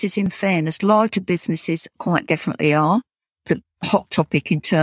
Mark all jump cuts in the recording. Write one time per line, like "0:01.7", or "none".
none